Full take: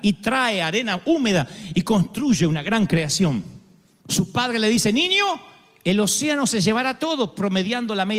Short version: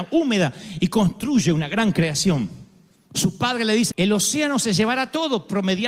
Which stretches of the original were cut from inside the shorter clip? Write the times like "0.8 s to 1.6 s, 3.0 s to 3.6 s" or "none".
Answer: 4.8 s to 5.8 s